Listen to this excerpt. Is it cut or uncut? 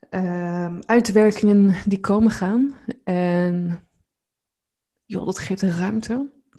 uncut